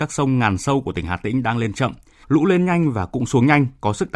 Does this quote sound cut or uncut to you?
cut